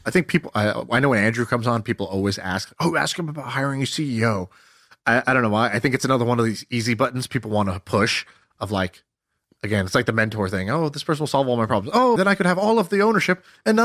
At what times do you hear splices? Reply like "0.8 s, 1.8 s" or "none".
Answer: 12.2 s